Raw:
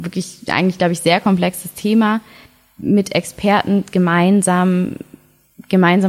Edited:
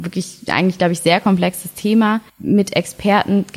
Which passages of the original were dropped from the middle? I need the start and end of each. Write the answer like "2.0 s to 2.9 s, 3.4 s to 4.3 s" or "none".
2.3 s to 2.7 s